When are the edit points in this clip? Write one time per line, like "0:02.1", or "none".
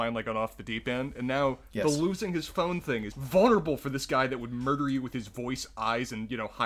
0:03.1